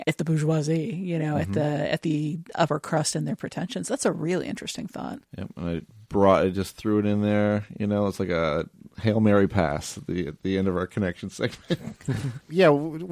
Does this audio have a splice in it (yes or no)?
no